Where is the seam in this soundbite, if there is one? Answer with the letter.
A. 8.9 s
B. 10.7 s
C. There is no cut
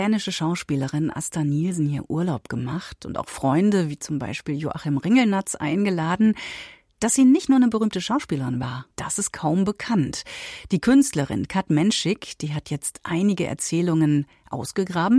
A